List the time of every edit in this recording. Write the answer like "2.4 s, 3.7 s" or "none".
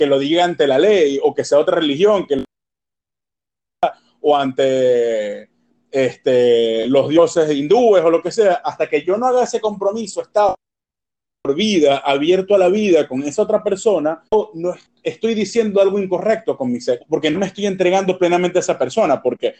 14.3 s, 17.0 s